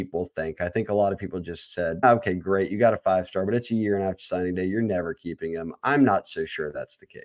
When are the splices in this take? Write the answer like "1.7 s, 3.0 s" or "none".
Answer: 2.0 s